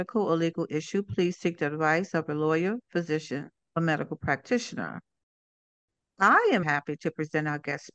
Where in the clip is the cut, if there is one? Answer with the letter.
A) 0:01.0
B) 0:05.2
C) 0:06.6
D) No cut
C